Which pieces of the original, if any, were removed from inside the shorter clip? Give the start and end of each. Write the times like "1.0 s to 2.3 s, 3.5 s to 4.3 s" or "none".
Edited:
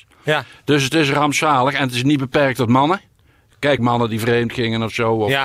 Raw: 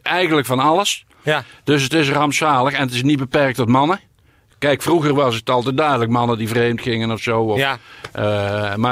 4.8 s to 6.1 s